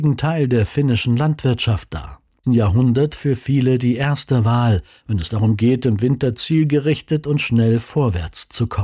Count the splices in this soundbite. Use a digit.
1